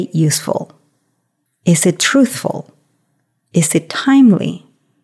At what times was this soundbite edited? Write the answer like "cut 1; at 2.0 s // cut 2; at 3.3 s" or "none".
none